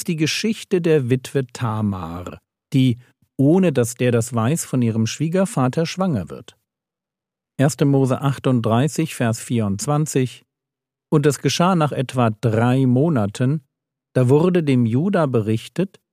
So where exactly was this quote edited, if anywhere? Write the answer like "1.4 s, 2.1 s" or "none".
none